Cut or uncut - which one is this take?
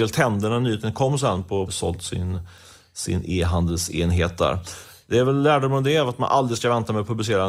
cut